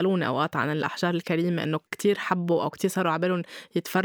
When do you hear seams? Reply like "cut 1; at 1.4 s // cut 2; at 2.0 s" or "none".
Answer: cut 1; at 1.9 s